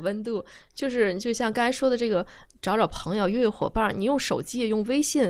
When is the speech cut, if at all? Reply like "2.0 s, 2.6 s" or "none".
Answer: none

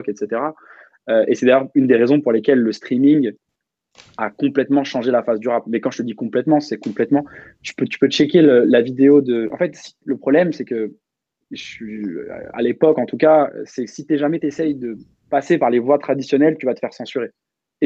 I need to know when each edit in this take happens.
9.5 s

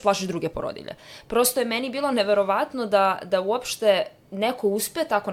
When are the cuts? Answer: none

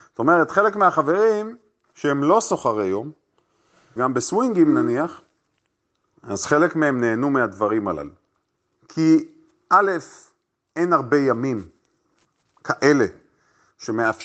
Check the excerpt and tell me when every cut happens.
4.0 s, 8.7 s

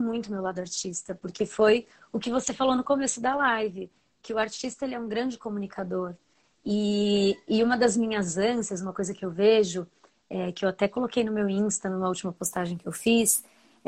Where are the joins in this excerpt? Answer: none

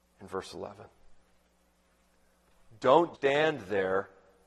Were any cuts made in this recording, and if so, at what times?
3.1 s

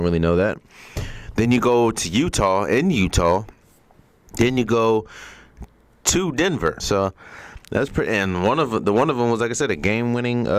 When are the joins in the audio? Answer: 6.8 s

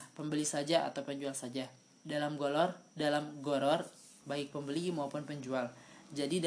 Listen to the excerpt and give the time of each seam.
2.9 s, 4.2 s

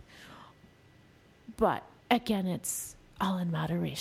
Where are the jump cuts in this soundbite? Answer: 2.0 s

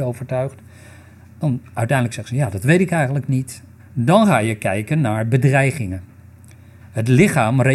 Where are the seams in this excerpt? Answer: 3.8 s

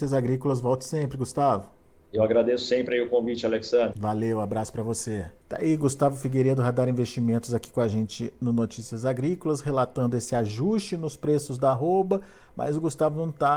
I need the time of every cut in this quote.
3.9 s, 5.4 s

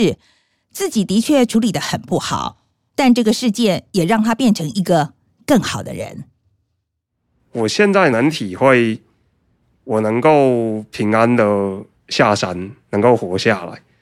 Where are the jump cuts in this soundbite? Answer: none

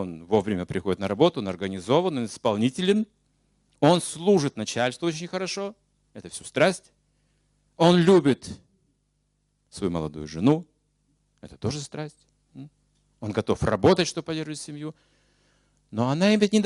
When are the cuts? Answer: none

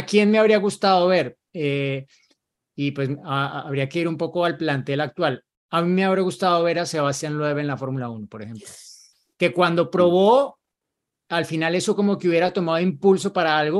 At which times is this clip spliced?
none

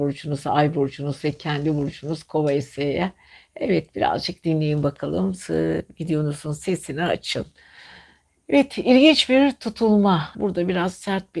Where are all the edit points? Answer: 10.3 s

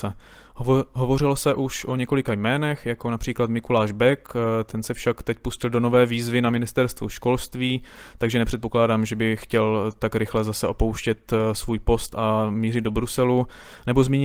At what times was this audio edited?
none

